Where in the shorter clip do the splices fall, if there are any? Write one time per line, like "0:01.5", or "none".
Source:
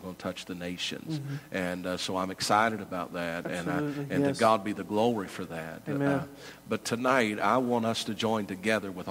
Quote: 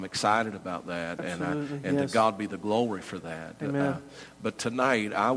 none